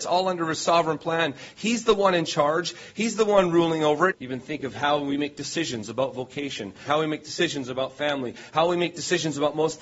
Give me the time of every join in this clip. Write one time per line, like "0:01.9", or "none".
0:04.1
0:06.9